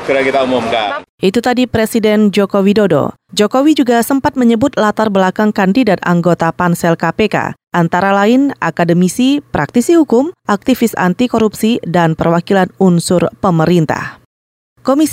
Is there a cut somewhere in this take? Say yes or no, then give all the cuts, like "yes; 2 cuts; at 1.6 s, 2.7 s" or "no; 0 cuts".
no; 0 cuts